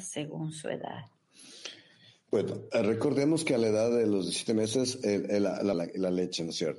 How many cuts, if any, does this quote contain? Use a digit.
1